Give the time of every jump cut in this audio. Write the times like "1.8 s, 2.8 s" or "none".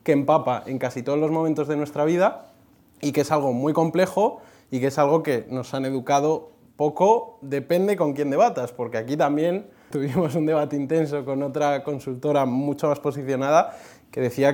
9.9 s